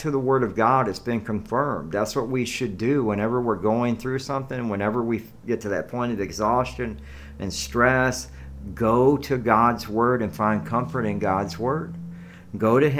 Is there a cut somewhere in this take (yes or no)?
no